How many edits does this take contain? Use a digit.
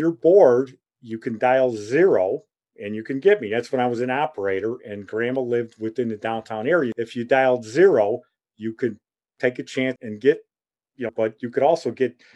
2